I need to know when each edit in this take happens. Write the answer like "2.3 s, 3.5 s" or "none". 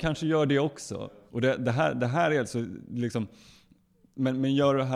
1.3 s